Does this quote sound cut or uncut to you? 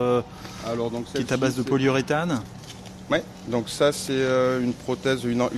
uncut